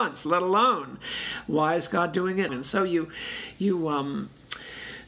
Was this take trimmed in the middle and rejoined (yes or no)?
yes